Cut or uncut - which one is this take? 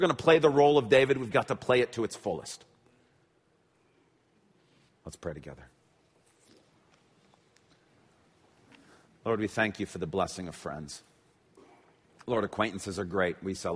cut